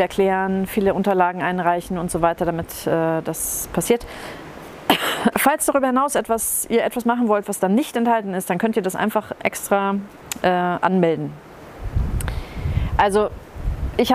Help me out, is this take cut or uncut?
cut